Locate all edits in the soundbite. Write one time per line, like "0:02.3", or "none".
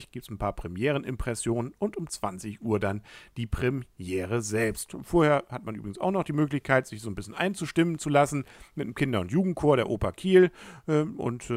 none

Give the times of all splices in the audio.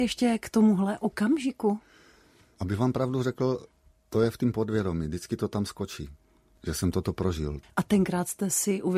0:07.6

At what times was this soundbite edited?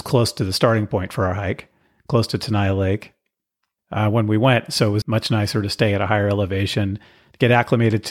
0:03.8
0:05.0

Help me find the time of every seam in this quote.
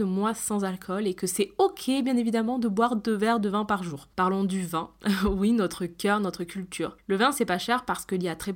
0:04.1

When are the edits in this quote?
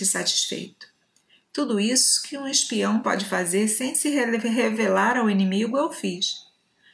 0:01.4

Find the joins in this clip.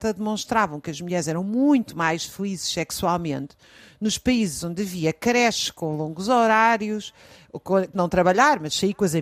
0:07.9

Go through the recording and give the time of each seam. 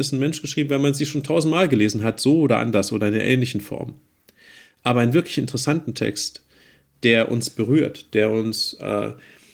none

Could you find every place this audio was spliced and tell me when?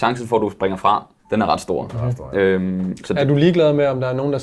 0:01.2

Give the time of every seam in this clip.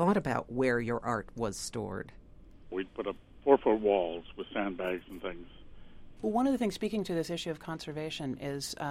0:02.7
0:06.2

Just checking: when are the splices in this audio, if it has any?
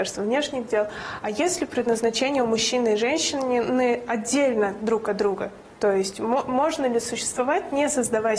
none

